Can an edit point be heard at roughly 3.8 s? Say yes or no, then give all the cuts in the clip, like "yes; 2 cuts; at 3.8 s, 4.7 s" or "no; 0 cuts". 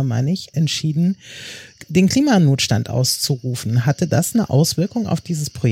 no; 0 cuts